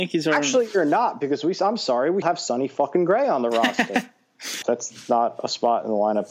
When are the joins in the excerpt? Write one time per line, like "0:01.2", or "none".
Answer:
0:02.2
0:04.6